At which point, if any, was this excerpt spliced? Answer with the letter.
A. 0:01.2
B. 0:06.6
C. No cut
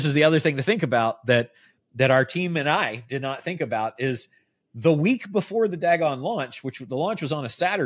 C